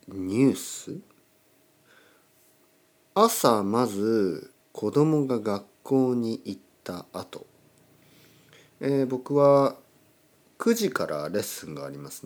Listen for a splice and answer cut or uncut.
cut